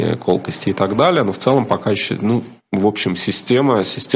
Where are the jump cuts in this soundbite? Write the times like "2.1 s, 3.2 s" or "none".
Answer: none